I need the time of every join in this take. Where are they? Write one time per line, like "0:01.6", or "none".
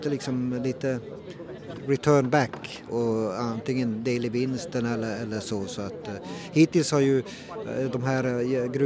0:02.9
0:05.1